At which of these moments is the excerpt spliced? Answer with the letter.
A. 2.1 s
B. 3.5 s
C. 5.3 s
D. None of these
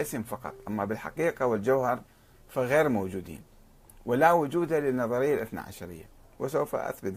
D